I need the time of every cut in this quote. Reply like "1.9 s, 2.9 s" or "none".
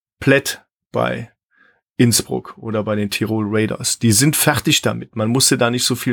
none